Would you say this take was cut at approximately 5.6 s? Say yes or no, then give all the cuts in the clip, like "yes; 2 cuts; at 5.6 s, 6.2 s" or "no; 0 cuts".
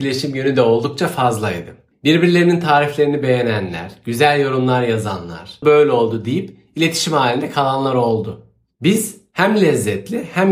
yes; 1 cut; at 5.6 s